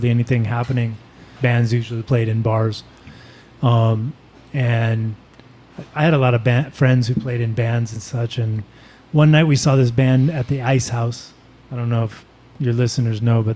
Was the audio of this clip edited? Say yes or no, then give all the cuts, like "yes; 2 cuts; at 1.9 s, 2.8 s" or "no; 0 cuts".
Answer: yes; 1 cut; at 1.4 s